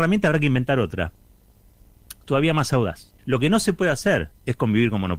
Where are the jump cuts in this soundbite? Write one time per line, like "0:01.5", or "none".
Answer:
0:03.2